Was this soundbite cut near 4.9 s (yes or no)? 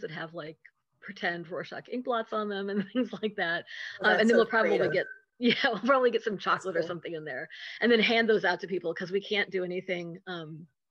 no